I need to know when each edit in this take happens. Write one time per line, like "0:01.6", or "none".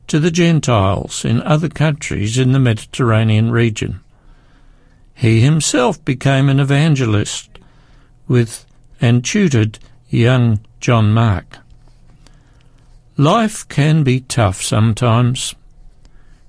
none

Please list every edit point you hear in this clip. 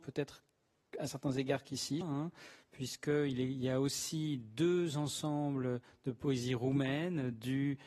0:02.0

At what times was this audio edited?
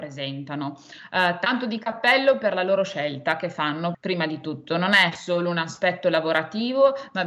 0:03.9

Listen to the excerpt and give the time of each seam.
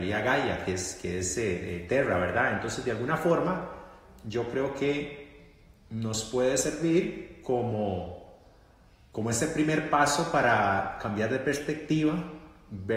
none

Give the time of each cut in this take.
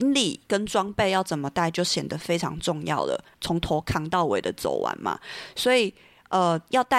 0:03.3

